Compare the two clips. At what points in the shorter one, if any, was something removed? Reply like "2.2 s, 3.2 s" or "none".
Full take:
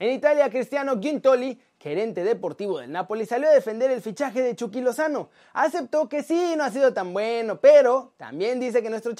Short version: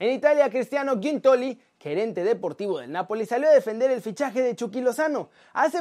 none